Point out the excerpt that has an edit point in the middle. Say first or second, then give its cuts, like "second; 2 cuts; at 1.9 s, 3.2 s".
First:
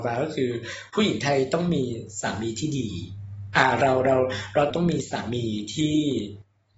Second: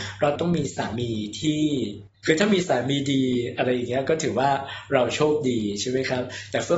second; 1 cut; at 2.1 s